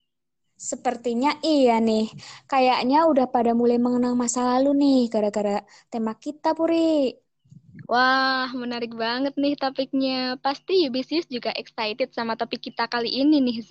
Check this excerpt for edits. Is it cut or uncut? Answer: cut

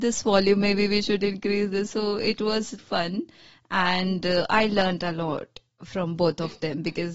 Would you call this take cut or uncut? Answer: cut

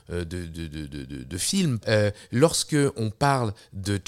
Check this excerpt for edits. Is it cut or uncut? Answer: cut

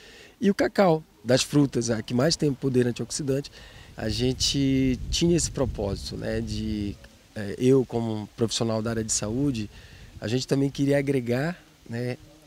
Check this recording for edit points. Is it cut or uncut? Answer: cut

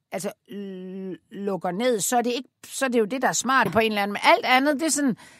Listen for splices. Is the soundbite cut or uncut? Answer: cut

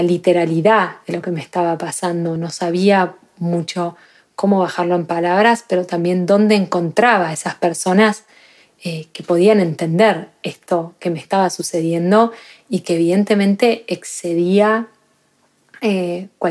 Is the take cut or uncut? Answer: uncut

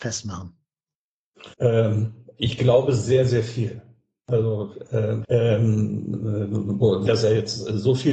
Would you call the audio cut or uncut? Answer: cut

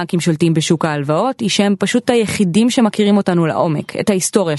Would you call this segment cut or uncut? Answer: uncut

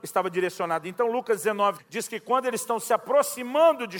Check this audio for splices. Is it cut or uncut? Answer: cut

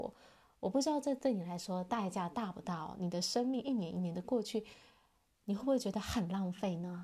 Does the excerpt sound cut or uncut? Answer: uncut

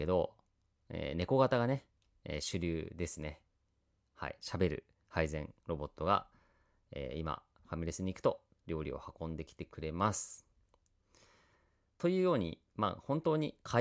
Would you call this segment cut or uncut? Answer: uncut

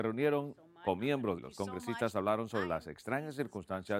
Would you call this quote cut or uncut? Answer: cut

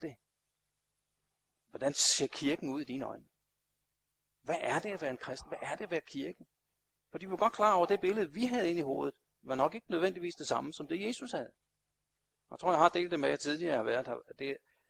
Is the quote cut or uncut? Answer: uncut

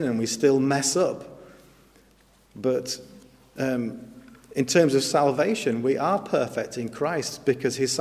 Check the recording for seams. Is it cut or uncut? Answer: uncut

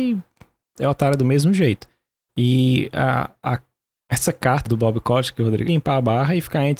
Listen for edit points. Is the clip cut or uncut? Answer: cut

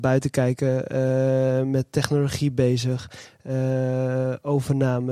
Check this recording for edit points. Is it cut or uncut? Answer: uncut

